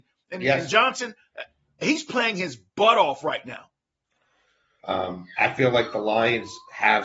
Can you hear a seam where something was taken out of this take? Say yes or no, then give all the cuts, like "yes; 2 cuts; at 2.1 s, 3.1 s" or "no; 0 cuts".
yes; 1 cut; at 4.8 s